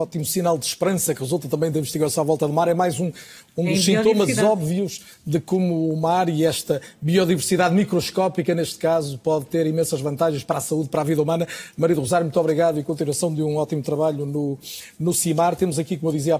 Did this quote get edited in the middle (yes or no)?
no